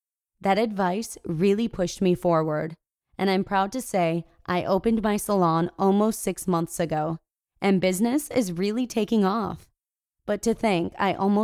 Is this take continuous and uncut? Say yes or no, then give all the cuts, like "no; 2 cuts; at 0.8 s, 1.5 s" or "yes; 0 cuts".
yes; 0 cuts